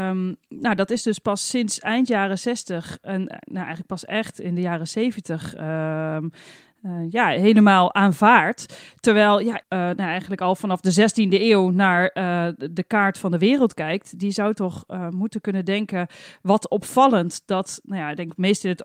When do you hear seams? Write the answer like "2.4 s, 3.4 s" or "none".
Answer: 9.6 s